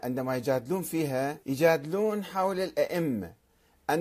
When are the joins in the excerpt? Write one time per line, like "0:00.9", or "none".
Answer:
0:01.4